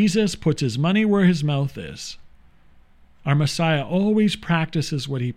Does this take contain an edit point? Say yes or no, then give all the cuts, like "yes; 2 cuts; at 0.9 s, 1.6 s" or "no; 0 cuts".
no; 0 cuts